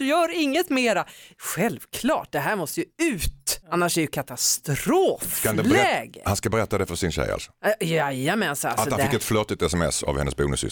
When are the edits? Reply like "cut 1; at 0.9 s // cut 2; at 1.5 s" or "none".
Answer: cut 1; at 3.6 s

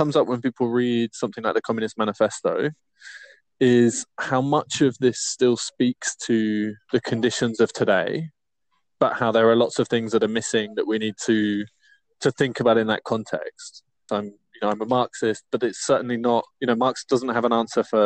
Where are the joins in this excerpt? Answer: cut 1; at 14.1 s // cut 2; at 16.5 s

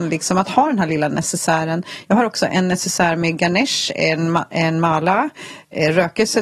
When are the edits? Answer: none

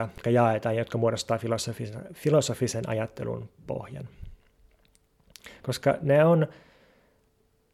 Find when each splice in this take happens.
cut 1; at 5.5 s

